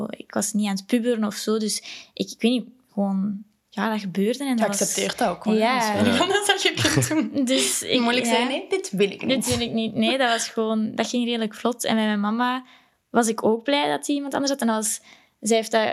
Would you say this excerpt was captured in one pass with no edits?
yes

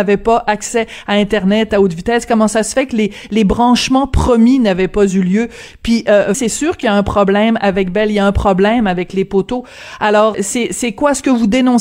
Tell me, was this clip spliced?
yes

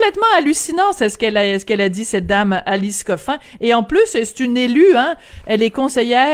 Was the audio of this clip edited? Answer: no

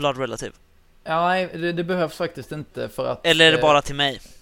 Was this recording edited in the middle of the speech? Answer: no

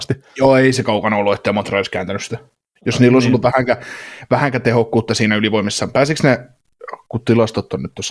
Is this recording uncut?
yes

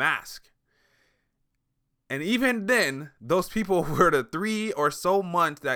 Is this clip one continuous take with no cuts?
yes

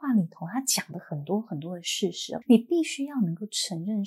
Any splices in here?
yes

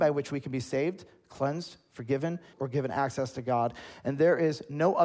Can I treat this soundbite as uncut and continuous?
no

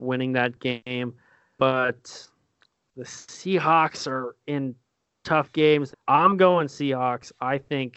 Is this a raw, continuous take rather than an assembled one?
no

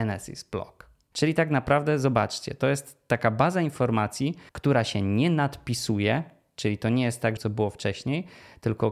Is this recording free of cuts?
no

